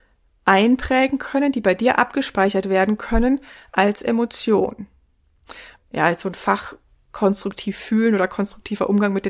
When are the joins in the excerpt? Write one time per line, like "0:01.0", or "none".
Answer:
0:05.8